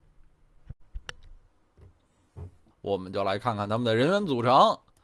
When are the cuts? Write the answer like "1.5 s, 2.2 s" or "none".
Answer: 2.7 s